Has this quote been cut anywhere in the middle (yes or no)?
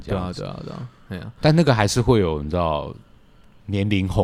no